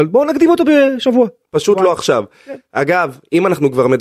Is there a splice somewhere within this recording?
no; 0 cuts

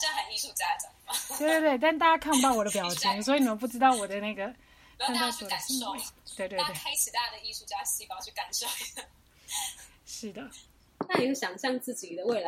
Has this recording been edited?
no; 0 cuts

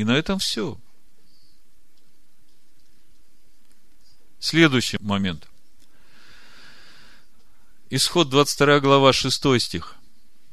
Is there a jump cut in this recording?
no; 0 cuts

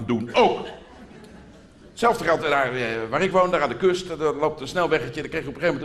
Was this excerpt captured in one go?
yes; 0 cuts

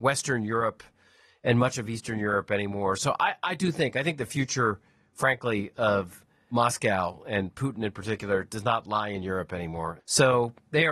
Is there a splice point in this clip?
yes; 1 cut; at 10.0 s

